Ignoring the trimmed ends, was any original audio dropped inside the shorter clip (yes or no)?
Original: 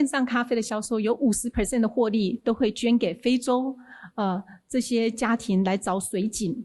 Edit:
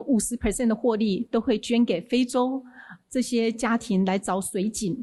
yes